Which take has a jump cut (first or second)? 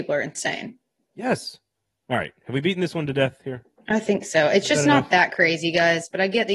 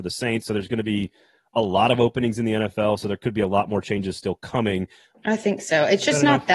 second